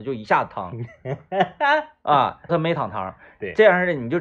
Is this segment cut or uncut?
cut